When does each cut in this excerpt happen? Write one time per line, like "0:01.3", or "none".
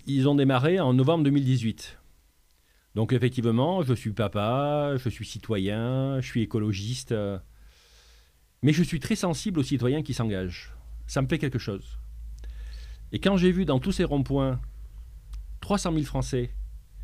none

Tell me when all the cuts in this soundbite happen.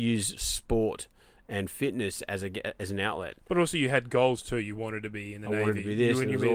none

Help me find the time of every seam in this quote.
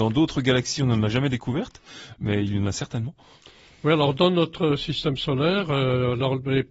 none

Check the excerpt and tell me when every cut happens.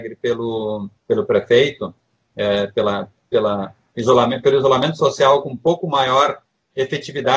0:01.0

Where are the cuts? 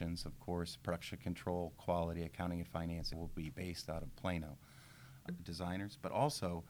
0:03.1
0:05.3

